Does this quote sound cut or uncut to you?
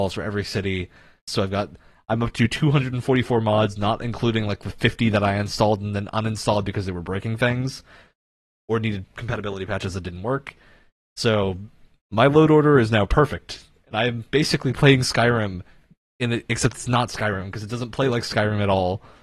cut